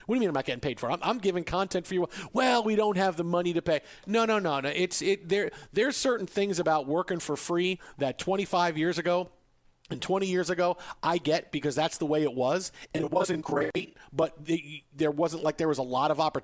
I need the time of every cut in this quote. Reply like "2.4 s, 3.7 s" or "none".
none

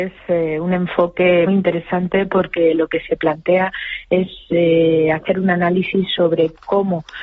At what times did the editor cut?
1.5 s

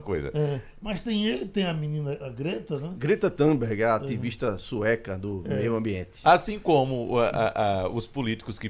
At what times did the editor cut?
6.2 s

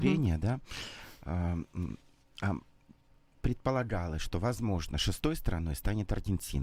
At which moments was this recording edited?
none

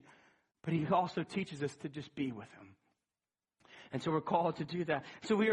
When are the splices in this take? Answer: none

